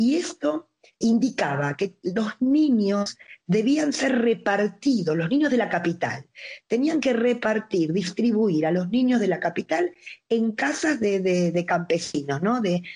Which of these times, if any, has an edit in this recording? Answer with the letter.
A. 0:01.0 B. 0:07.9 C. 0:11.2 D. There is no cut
A